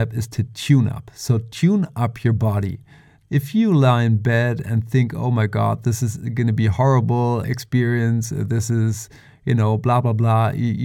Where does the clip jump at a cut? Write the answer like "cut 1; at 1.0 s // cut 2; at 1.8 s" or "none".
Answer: cut 1; at 3.2 s // cut 2; at 7.4 s